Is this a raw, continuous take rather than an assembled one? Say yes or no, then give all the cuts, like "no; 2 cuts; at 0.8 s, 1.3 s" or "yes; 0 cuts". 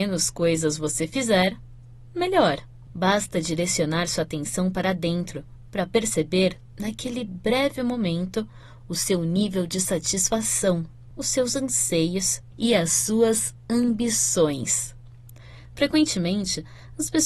no; 1 cut; at 2.9 s